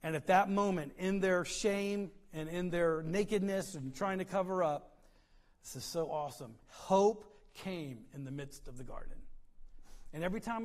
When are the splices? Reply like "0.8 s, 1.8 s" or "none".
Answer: none

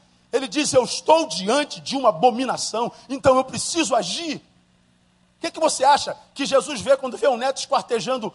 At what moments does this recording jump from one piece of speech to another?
5.2 s

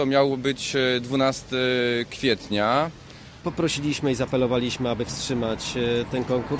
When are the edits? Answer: 3.4 s

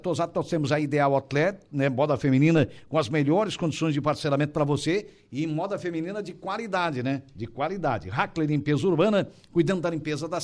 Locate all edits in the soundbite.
none

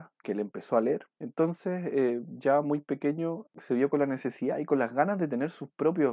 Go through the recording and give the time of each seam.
1.1 s, 3.5 s

